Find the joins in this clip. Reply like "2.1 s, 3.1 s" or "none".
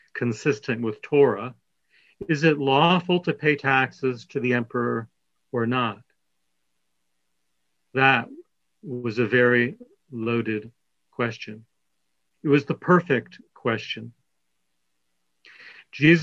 none